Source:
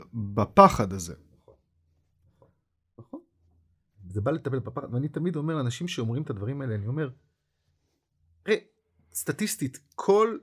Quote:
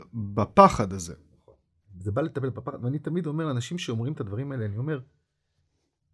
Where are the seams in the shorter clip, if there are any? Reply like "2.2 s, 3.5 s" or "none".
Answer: 1.8 s